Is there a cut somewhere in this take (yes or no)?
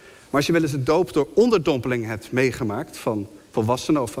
no